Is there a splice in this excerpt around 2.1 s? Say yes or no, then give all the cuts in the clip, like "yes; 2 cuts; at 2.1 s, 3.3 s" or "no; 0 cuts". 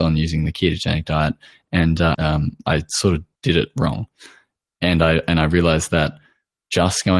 yes; 2 cuts; at 2.1 s, 3.3 s